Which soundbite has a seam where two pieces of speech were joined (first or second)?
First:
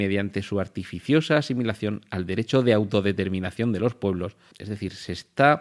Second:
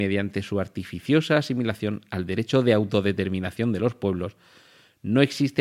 first